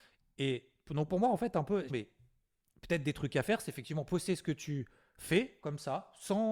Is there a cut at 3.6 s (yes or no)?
no